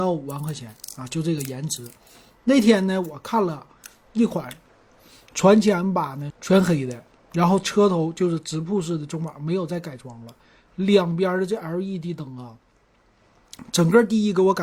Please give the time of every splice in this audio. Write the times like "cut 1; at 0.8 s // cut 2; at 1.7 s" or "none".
cut 1; at 6.3 s